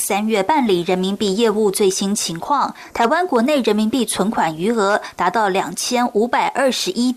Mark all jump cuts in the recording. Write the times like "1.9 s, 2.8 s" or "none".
none